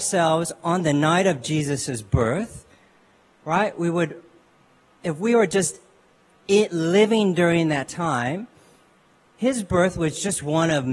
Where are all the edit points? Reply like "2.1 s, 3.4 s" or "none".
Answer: none